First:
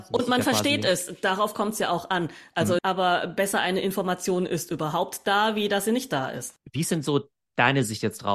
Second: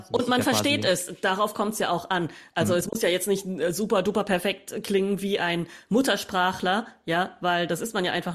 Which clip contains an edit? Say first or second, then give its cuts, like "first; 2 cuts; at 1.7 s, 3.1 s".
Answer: first; 1 cut; at 2.8 s